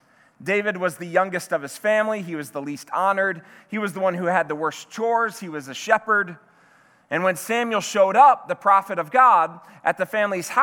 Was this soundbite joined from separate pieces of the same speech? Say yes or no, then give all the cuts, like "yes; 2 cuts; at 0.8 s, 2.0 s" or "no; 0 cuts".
no; 0 cuts